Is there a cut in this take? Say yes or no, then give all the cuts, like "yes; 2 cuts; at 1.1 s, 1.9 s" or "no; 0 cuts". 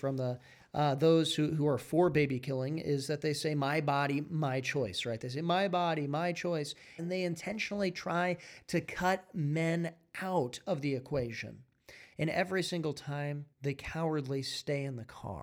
yes; 3 cuts; at 7.0 s, 12.1 s, 13.5 s